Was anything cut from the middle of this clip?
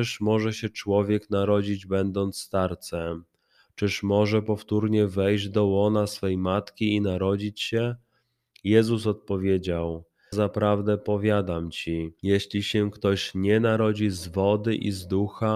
yes; 2 cuts; at 10.3 s, 12.2 s

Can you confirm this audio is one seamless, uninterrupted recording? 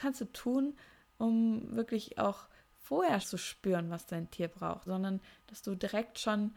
no; 2 cuts; at 3.2 s, 4.9 s

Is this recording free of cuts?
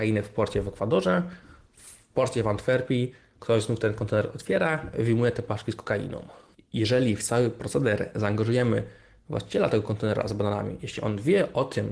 yes; 0 cuts

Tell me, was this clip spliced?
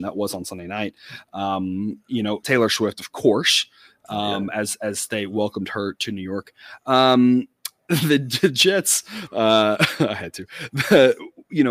yes; 1 cut; at 2.4 s

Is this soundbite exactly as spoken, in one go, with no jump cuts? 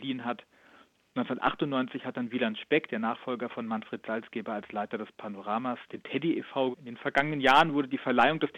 no; 1 cut; at 6.7 s

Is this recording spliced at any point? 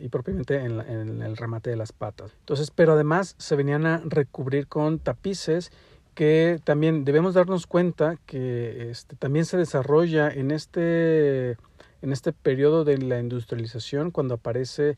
yes; 1 cut; at 2.3 s

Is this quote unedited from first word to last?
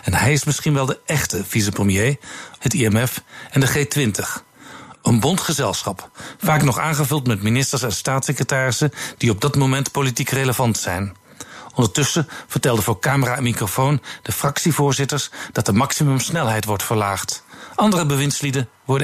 no; 2 cuts; at 2.6 s, 11.7 s

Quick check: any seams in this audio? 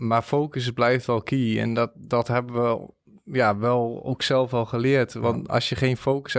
no; 0 cuts

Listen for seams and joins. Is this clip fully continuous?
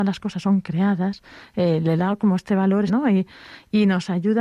no; 1 cut; at 2.9 s

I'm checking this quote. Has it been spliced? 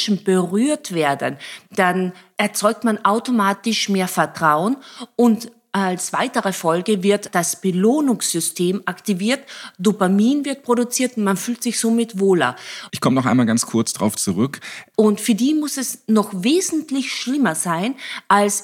yes; 3 cuts; at 7.3 s, 12.9 s, 14.9 s

